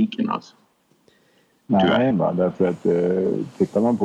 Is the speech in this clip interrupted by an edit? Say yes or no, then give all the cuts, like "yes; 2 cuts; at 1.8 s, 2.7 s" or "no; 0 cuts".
yes; 1 cut; at 2.1 s